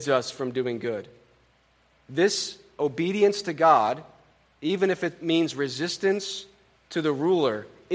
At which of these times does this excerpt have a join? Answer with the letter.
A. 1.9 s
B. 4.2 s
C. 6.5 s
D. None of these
D